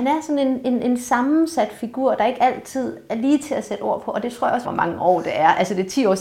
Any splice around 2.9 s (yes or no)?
no